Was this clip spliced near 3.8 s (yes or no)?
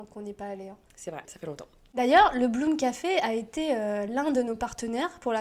no